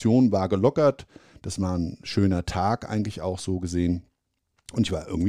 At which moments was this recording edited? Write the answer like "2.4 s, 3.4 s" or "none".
none